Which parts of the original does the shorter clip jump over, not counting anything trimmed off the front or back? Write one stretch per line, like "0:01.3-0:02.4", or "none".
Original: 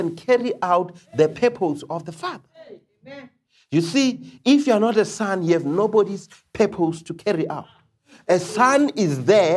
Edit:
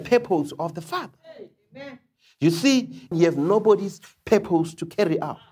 0:04.4-0:05.4

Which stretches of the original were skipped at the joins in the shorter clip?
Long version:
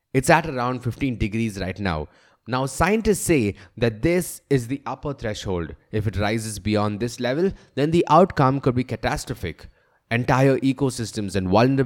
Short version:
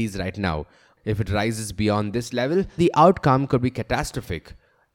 0:02.4-0:05.8
0:07.6-0:07.9

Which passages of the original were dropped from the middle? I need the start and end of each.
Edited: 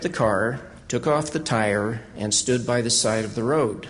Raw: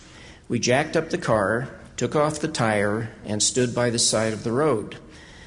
none

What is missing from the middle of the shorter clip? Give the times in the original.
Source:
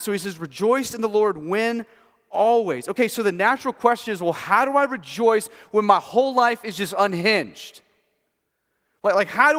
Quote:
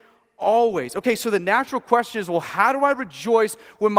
none

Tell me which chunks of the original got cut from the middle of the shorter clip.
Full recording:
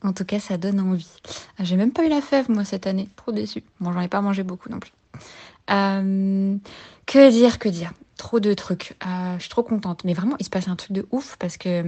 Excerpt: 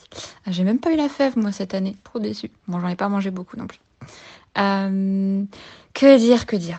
none

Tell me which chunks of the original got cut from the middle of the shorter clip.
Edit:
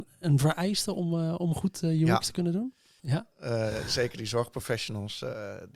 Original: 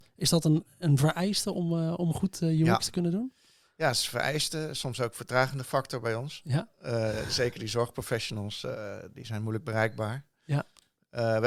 0:03.6-0:06.4

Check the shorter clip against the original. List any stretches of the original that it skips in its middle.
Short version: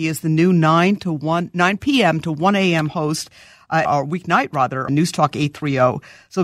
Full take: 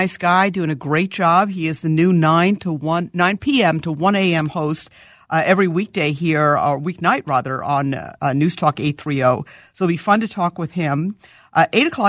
0:05.5-0:06.6
0:07.6-0:08.3

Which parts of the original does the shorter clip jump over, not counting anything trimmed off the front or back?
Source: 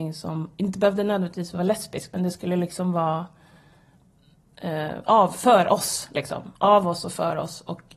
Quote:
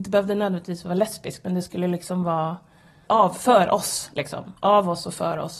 0:03.8-0:05.1

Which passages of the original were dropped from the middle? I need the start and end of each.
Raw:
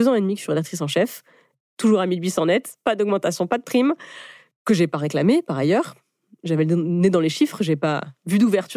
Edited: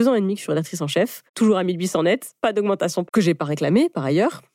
0:01.3-0:01.7
0:03.5-0:04.6

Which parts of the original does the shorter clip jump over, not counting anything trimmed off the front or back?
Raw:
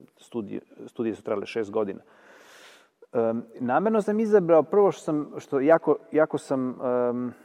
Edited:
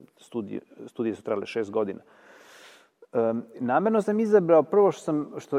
none

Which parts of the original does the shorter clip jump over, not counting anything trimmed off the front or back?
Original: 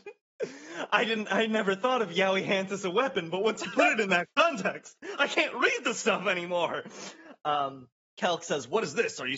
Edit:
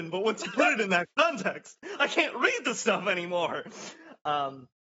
none

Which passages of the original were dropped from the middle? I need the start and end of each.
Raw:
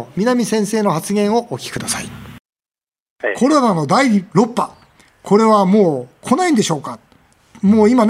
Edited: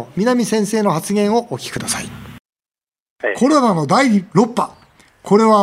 none

